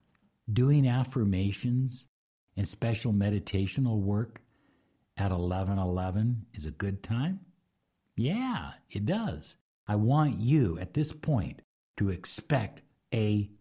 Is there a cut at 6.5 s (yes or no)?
yes